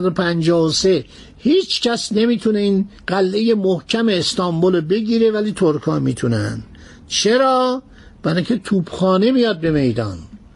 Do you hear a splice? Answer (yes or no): yes